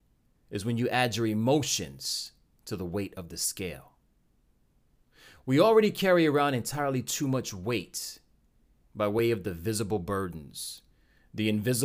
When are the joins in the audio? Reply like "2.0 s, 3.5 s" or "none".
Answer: none